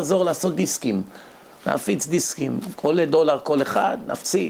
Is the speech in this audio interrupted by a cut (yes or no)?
no